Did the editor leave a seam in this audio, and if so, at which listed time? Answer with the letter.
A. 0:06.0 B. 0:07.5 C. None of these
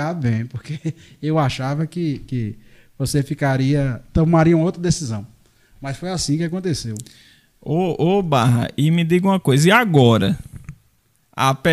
C